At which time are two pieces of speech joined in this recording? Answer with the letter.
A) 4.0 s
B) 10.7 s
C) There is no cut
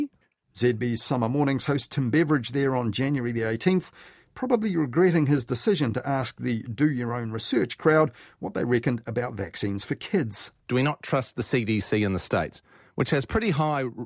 B